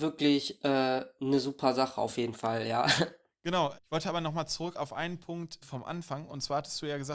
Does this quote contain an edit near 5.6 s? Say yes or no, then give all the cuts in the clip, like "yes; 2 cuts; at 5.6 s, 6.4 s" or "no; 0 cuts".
yes; 2 cuts; at 3.8 s, 5.6 s